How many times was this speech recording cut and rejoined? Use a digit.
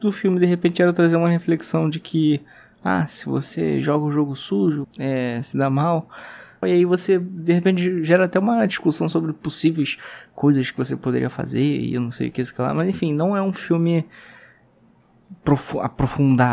2